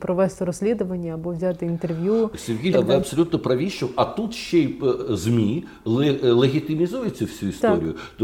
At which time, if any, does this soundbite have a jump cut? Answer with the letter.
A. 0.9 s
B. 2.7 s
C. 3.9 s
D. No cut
B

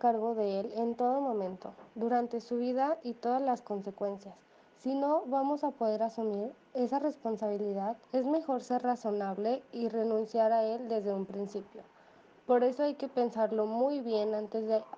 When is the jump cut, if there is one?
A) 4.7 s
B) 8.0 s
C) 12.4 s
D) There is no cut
B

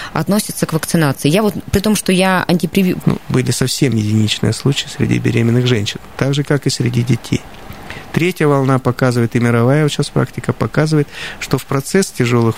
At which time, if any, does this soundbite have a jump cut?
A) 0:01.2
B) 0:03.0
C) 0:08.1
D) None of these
B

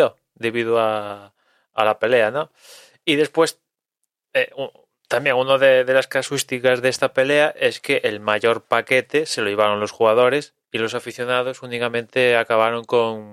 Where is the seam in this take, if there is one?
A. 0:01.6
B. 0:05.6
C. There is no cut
C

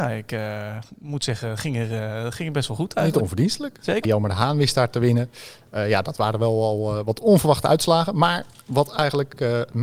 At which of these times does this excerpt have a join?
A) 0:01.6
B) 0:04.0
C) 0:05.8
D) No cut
B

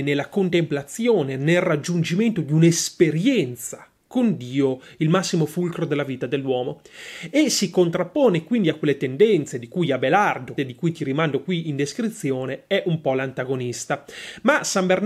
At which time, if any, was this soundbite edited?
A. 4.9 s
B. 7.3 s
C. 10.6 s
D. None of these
C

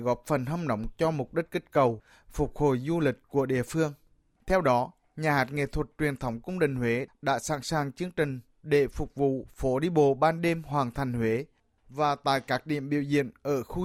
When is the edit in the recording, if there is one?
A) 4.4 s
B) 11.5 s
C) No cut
A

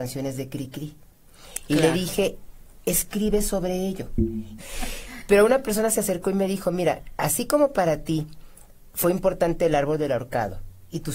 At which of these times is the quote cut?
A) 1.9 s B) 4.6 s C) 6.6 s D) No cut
B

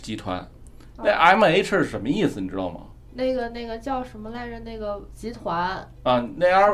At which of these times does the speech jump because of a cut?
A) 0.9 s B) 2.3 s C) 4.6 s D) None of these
D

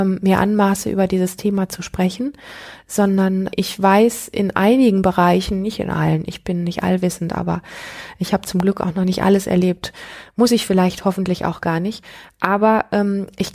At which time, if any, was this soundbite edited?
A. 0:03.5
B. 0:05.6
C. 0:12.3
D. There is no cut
A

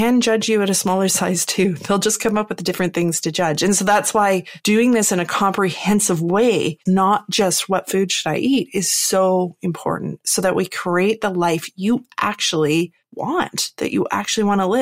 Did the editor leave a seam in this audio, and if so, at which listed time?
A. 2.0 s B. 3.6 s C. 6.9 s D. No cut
C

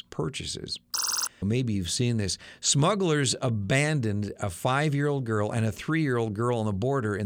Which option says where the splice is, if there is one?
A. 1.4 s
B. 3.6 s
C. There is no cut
A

